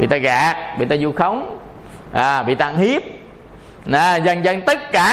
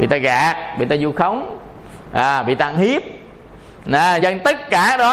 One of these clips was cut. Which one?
second; 1 cut; at 4.2 s

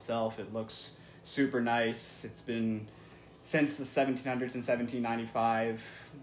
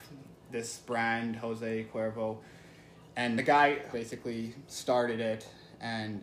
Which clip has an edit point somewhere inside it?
second; 1 cut; at 3.9 s

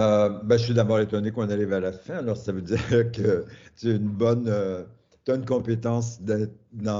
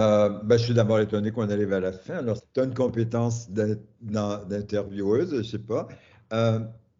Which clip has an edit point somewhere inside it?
second; 1 cut; at 2.4 s

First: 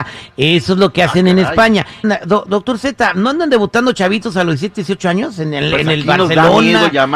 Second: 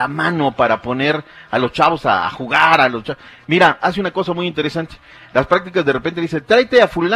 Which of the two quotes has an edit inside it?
first; 1 cut; at 2.0 s

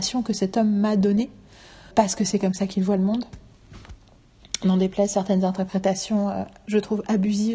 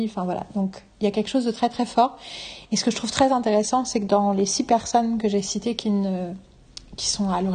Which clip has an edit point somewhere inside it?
first; 1 cut; at 1.9 s

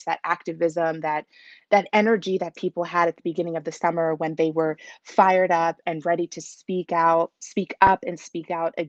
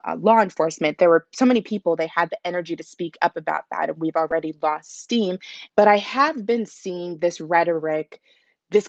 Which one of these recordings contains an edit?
second; 1 cut; at 5.7 s

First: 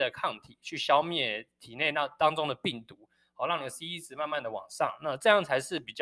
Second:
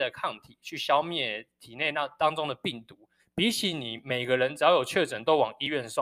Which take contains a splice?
second; 1 cut; at 3.2 s

